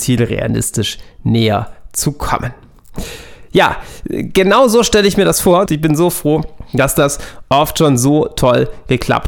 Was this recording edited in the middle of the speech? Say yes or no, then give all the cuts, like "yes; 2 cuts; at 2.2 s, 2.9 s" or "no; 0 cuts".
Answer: yes; 1 cut; at 5.7 s